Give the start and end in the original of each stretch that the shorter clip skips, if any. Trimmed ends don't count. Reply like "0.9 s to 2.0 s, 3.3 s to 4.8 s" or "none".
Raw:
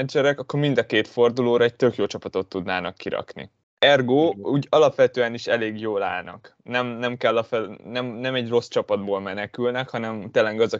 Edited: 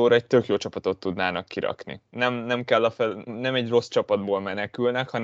3.6 s to 6.6 s, 7.8 s to 8.1 s